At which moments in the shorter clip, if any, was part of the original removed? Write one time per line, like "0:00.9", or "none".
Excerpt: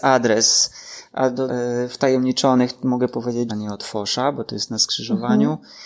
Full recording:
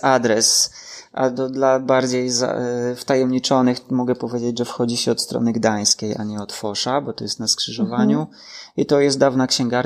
0:01.5
0:03.5